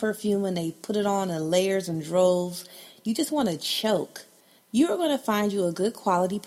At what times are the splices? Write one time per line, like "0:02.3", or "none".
0:04.6